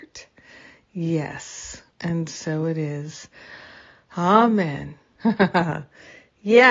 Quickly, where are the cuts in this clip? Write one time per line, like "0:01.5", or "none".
0:01.9
0:05.2